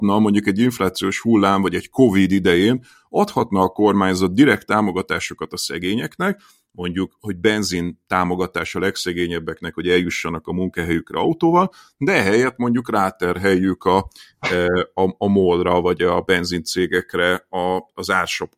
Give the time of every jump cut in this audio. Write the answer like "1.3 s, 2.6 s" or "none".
none